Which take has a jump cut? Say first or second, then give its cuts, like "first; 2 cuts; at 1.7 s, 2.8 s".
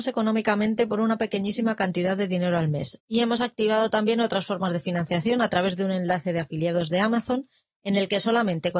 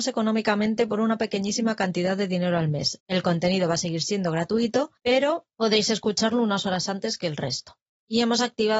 first; 1 cut; at 3.0 s